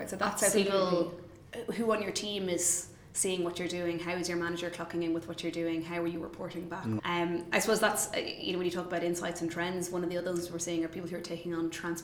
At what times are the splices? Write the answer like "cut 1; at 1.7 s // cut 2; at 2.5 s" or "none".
cut 1; at 7.0 s

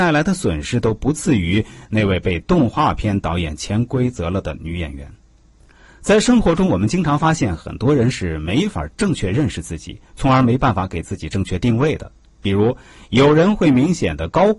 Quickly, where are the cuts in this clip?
none

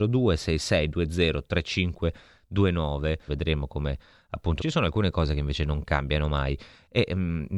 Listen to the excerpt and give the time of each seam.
cut 1; at 3.3 s // cut 2; at 4.6 s

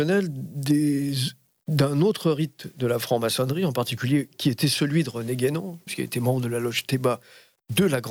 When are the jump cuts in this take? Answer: cut 1; at 5.9 s

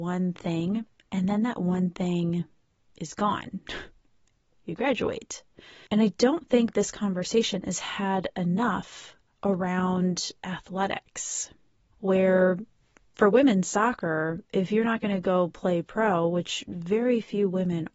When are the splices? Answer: cut 1; at 5.9 s // cut 2; at 11.9 s

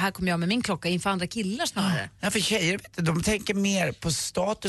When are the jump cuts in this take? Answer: none

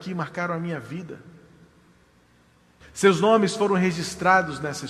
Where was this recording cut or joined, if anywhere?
cut 1; at 2.8 s

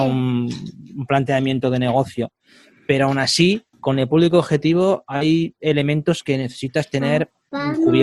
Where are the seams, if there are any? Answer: cut 1; at 3.7 s

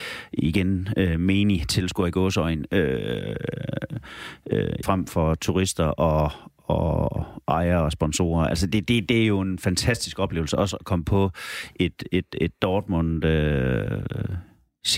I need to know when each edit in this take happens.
cut 1; at 4.8 s

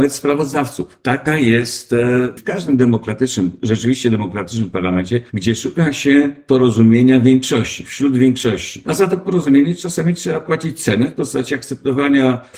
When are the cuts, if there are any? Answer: cut 1; at 2.4 s

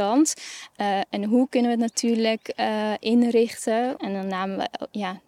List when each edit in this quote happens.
cut 1; at 4.0 s

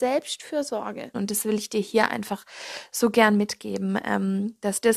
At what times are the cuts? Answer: cut 1; at 1.1 s

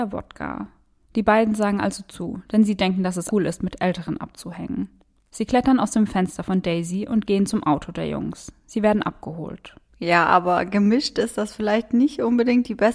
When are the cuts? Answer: cut 1; at 3.3 s // cut 2; at 9.9 s

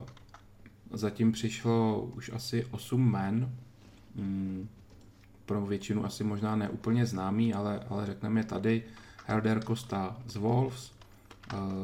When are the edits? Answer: none

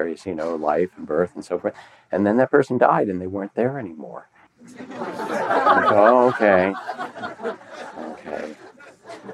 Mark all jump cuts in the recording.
cut 1; at 4.5 s

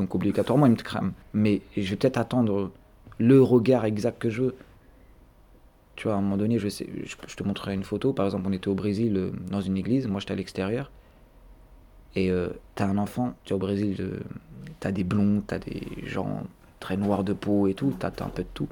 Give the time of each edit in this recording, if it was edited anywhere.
cut 1; at 1.2 s // cut 2; at 13.4 s

